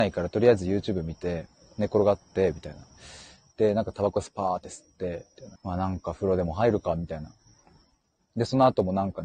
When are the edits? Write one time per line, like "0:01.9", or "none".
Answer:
0:05.6